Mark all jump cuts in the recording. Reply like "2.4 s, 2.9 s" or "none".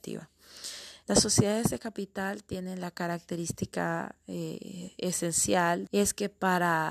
1.0 s, 5.9 s